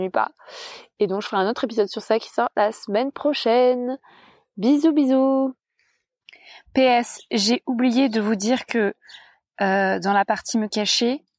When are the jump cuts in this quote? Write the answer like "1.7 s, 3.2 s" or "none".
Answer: none